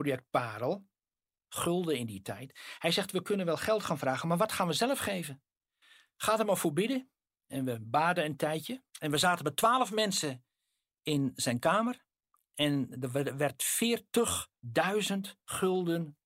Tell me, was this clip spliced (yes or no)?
yes